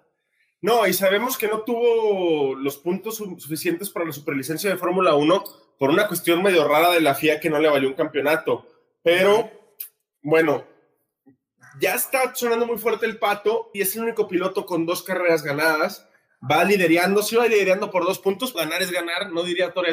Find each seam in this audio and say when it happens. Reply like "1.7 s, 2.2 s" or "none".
13.7 s, 18.5 s